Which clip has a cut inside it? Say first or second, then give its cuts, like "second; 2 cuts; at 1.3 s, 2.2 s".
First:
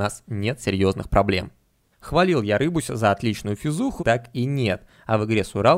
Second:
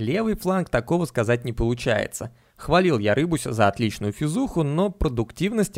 first; 2 cuts; at 1.9 s, 4.0 s